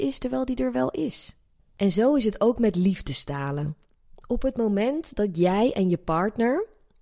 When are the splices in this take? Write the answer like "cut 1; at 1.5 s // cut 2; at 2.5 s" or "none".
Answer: cut 1; at 1.6 s